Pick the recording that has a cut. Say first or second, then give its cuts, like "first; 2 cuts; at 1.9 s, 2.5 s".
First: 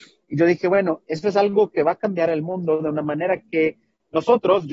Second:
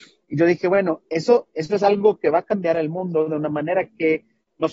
first; 1 cut; at 1.0 s